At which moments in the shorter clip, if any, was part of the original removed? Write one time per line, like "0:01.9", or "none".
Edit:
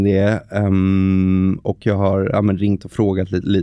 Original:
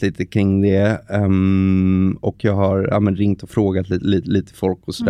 none